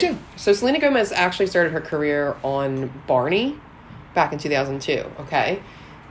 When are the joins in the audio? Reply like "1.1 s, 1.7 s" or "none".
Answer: none